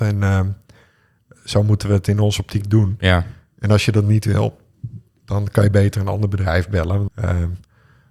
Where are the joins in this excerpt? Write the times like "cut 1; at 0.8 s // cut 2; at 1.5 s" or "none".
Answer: cut 1; at 7.1 s